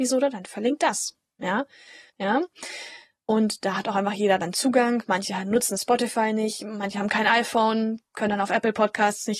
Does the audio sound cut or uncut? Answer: cut